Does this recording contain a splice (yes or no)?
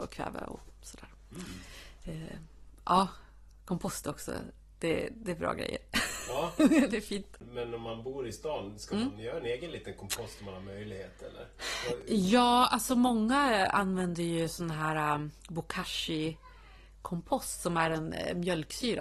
no